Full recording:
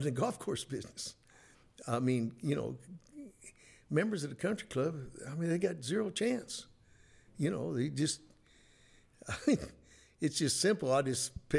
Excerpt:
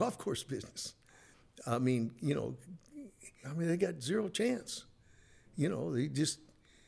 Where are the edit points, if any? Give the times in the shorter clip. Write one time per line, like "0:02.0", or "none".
0:03.4